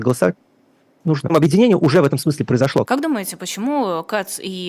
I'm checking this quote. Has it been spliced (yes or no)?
yes